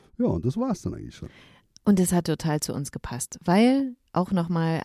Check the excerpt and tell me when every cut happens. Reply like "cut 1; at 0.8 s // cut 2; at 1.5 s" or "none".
none